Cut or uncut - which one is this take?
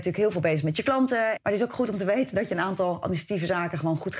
cut